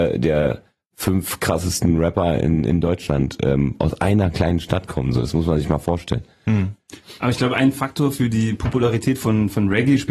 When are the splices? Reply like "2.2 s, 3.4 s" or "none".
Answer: none

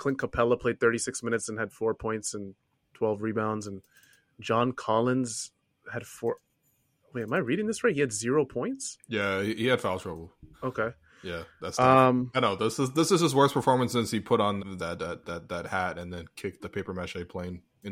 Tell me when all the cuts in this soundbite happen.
10.5 s, 14.6 s, 16.6 s

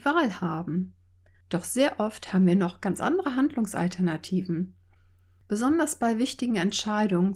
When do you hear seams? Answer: 1.3 s

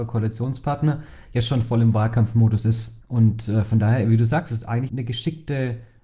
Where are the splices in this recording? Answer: 4.9 s

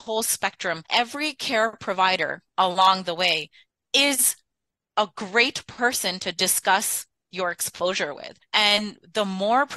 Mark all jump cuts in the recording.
none

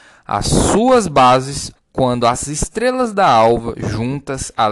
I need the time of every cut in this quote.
1.8 s

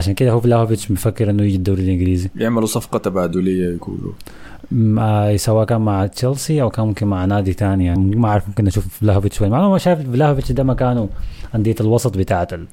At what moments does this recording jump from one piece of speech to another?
8.0 s

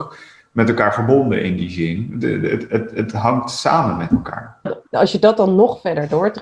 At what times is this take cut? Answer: 4.7 s

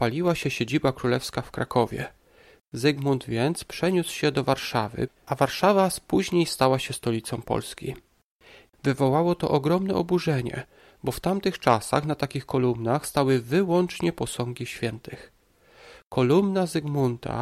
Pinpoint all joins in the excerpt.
5.1 s, 8.7 s

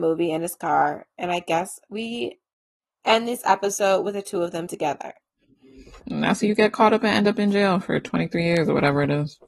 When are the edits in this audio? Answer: 4.7 s, 6.0 s

